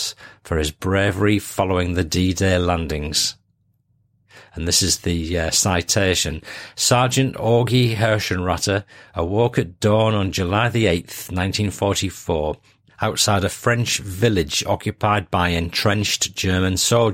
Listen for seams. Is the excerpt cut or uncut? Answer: uncut